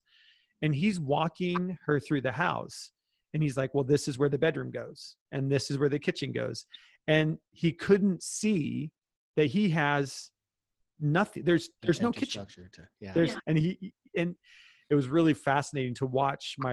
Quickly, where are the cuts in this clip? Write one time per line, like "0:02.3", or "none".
0:13.4